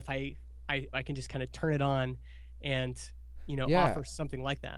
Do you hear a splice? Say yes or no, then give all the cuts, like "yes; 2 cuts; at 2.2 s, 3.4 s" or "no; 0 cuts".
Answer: yes; 1 cut; at 0.9 s